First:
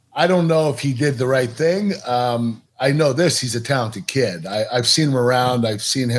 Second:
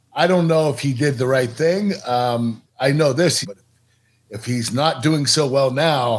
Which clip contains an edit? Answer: second; 1 cut; at 3.4 s

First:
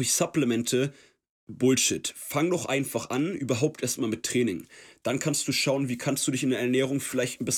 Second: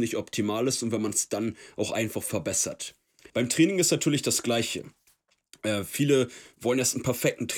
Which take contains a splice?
second; 1 cut; at 3.3 s

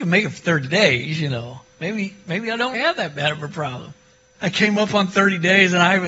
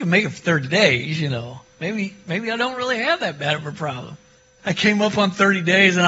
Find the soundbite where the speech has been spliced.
first; 1 cut; at 2.7 s

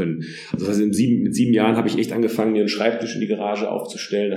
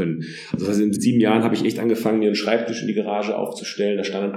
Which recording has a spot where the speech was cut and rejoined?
second; 1 cut; at 0.9 s

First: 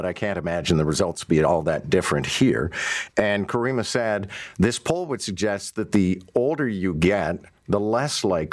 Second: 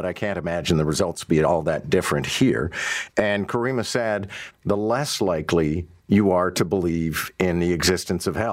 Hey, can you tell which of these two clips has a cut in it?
second; 1 cut; at 4.5 s

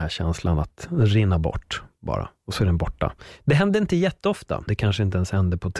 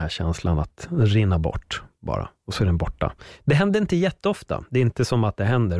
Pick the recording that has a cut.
first; 1 cut; at 4.7 s

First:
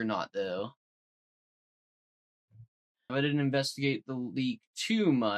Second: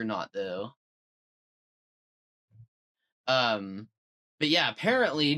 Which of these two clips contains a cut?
first; 1 cut; at 3.1 s

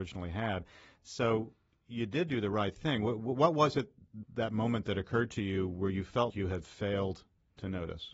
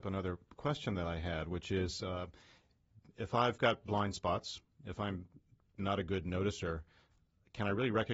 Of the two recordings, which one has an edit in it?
first; 2 cuts; at 4.2 s, 6.3 s

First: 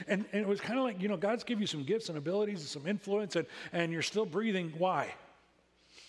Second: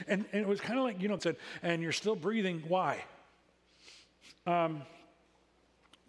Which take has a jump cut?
second; 2 cuts; at 1.2 s, 4.5 s

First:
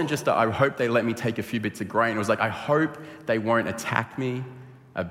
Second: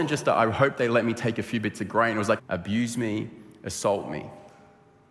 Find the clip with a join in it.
second; 1 cut; at 2.4 s

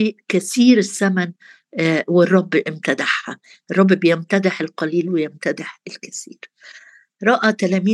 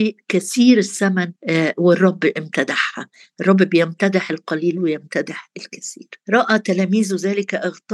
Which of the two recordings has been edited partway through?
second; 2 cuts; at 1.4 s, 6.2 s

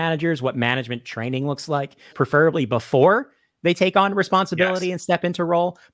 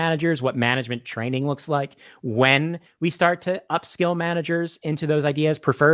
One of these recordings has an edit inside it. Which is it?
first; 1 cut; at 2.1 s

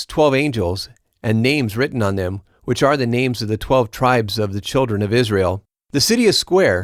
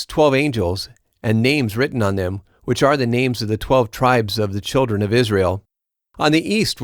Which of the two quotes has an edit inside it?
first; 1 cut; at 5.8 s

